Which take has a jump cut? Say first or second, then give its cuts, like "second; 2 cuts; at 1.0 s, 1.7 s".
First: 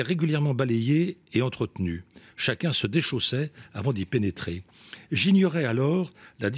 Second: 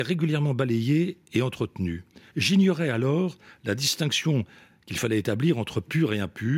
second; 1 cut; at 2.3 s